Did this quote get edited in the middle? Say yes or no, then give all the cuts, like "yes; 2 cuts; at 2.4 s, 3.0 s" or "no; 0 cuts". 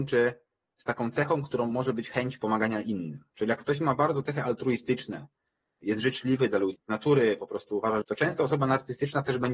yes; 3 cuts; at 3.3 s, 6.8 s, 8.0 s